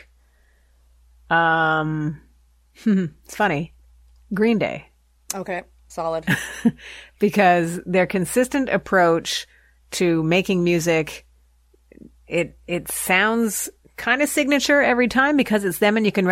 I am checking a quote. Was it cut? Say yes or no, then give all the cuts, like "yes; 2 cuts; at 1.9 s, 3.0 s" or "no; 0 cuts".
no; 0 cuts